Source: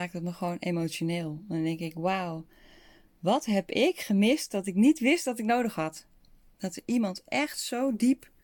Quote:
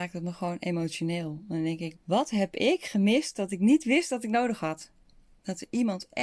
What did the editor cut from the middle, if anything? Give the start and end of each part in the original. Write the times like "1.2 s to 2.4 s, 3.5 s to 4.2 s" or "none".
1.9 s to 3.1 s